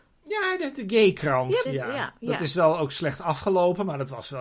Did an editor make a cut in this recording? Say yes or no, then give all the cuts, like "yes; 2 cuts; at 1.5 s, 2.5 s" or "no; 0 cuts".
yes; 1 cut; at 1.7 s